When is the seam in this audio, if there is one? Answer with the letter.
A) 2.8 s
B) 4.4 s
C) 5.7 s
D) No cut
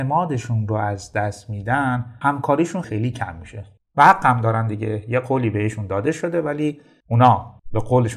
A